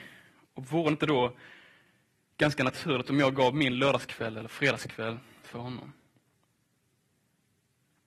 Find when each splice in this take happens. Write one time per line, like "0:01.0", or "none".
none